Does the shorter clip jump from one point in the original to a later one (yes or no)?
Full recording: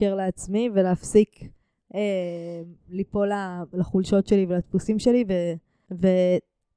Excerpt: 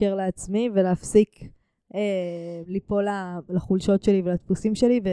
yes